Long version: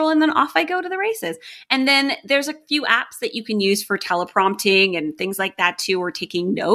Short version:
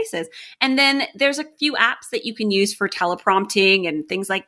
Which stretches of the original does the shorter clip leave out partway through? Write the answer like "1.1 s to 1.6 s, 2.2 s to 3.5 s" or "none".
none